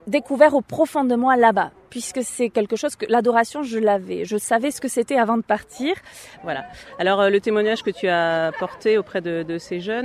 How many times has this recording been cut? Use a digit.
1